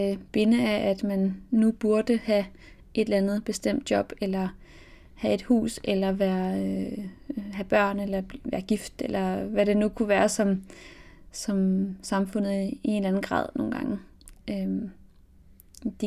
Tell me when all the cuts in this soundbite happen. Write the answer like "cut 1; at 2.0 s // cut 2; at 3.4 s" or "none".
none